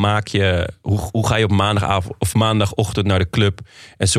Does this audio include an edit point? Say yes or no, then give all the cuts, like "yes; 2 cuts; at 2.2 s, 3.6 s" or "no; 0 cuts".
no; 0 cuts